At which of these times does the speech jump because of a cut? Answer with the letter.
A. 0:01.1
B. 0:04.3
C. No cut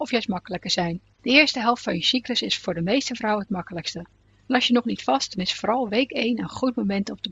A